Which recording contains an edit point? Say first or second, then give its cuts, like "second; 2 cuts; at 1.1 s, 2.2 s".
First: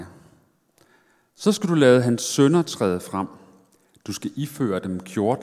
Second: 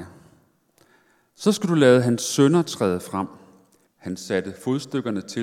second; 1 cut; at 3.9 s